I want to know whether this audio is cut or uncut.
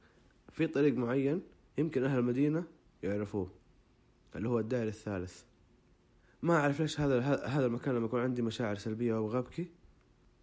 uncut